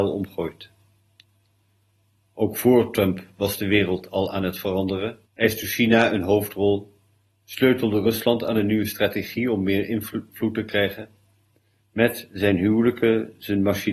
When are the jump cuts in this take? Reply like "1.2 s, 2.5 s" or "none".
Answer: 5.2 s, 11.8 s